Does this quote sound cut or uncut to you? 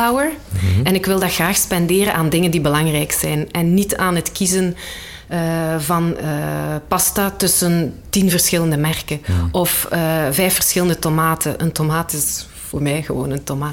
uncut